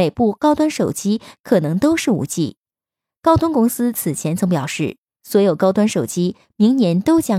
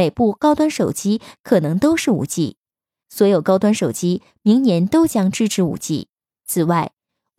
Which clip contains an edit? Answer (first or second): second